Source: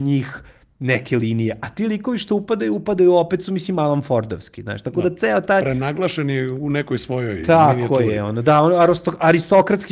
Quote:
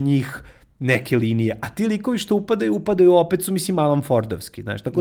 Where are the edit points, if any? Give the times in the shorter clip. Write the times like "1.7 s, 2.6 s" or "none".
none